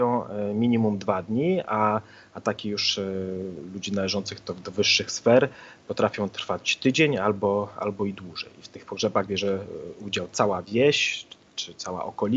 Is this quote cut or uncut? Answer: uncut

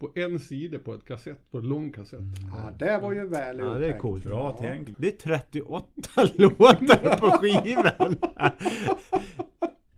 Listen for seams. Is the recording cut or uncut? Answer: cut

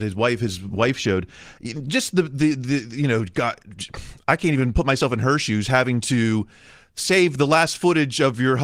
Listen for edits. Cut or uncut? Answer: uncut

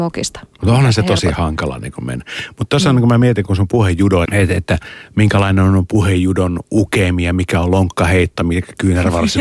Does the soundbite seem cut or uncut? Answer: cut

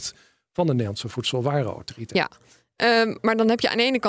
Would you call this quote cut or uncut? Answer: uncut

